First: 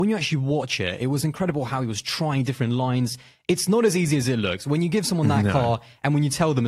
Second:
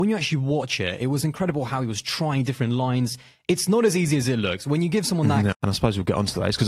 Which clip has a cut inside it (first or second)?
second